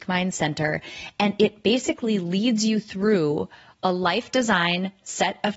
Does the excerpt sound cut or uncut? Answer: uncut